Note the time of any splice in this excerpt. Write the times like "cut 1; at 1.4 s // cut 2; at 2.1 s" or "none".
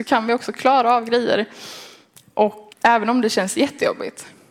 cut 1; at 2.7 s